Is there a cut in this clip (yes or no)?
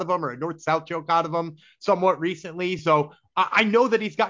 no